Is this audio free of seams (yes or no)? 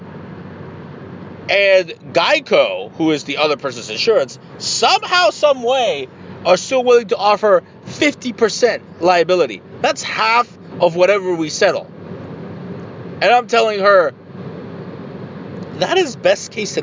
yes